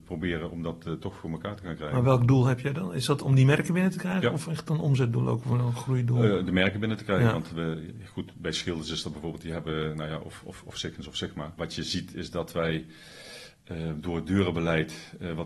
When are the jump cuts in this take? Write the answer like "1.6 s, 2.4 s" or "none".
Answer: 11.6 s